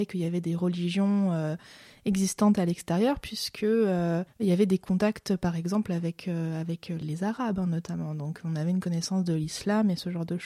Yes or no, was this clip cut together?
yes